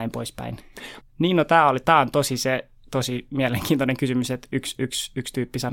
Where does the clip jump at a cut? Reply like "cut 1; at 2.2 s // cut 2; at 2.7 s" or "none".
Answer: cut 1; at 1.0 s